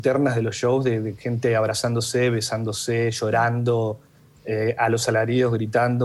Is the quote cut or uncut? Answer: uncut